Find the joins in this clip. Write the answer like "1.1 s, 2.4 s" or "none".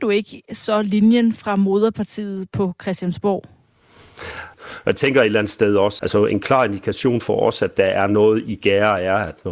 4.5 s, 6.0 s